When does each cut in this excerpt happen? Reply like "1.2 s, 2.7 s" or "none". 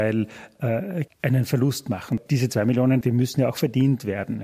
1.1 s, 3.0 s